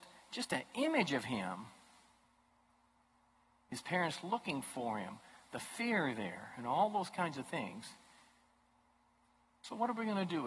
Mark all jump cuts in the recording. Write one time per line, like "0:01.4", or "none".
none